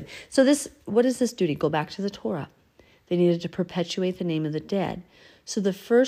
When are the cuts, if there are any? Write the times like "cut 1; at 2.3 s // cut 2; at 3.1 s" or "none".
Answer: none